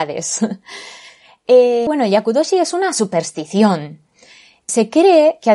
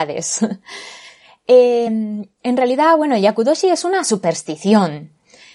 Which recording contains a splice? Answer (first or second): first